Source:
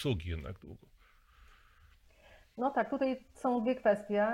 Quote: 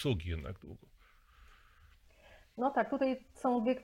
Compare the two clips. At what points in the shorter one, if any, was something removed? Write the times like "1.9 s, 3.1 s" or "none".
none